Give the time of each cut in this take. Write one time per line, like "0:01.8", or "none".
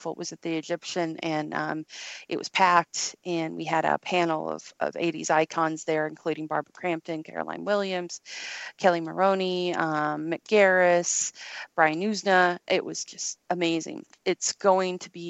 0:14.2